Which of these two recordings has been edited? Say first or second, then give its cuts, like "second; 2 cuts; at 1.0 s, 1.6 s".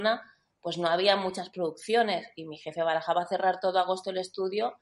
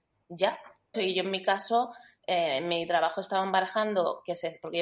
second; 1 cut; at 0.9 s